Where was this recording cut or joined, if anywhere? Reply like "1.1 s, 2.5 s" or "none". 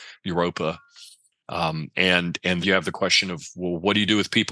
2.6 s

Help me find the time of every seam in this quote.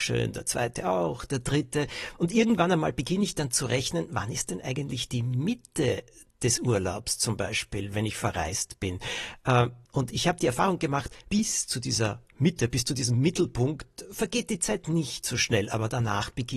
none

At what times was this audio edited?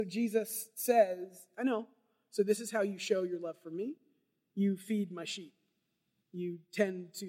none

